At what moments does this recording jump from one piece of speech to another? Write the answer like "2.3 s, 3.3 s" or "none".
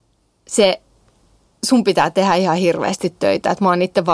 none